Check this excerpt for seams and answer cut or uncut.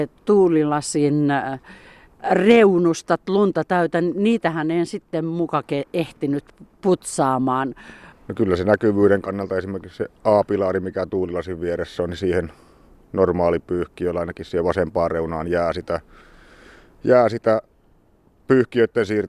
cut